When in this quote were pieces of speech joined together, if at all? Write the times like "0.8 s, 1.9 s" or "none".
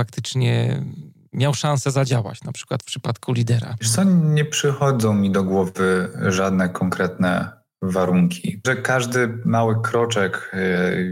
8.6 s